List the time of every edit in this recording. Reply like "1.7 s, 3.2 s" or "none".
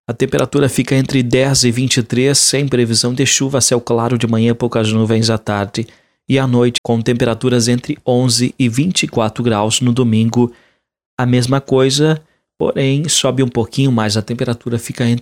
6.8 s